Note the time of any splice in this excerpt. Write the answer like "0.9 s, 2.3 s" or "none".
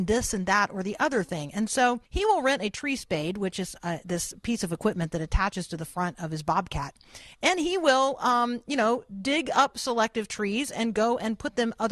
2.1 s